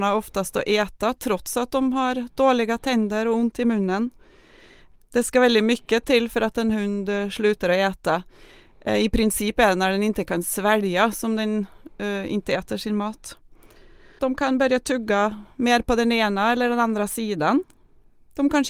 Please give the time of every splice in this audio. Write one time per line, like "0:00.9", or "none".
0:14.2